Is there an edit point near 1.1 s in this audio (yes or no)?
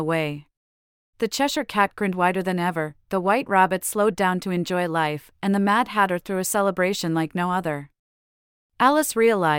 yes